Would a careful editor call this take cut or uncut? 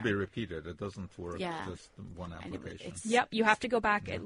uncut